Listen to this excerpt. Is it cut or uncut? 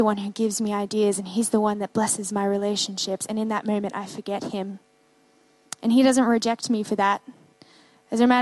uncut